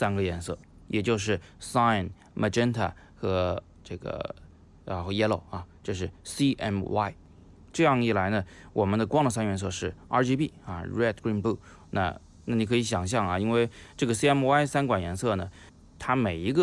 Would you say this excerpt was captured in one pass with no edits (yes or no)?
no